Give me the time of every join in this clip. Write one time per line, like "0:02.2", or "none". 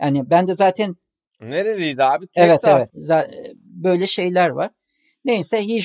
0:02.9